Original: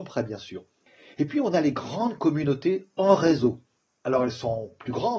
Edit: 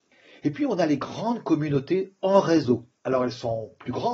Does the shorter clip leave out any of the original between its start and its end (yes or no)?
yes